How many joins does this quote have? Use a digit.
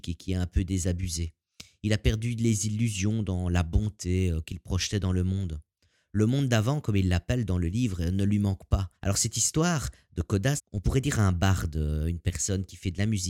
2